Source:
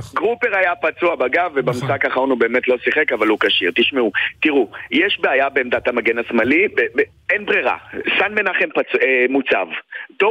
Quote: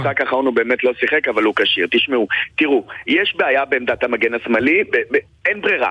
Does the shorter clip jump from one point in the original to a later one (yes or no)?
no